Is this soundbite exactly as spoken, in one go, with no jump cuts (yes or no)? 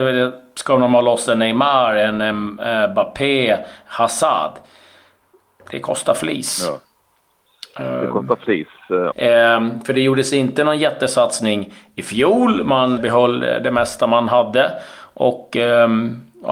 no